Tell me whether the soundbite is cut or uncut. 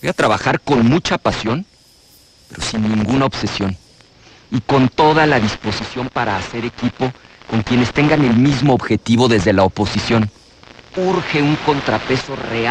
cut